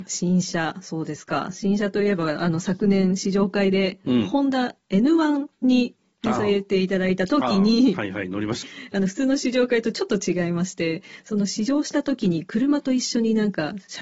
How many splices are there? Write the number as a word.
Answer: one